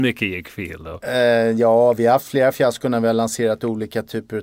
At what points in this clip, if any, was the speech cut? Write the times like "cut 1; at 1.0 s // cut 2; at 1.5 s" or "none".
none